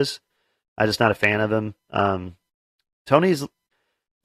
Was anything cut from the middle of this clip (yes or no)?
no